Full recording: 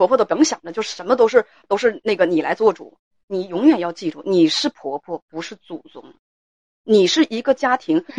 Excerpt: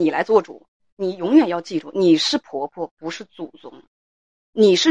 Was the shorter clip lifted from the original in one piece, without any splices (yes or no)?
yes